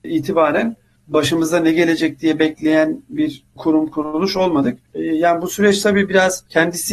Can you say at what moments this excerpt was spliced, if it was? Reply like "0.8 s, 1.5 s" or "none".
4.9 s